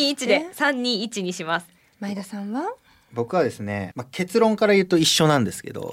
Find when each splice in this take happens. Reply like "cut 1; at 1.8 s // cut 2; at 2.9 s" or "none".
cut 1; at 3.9 s